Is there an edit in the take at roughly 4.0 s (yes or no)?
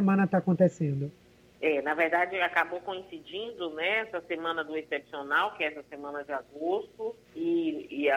no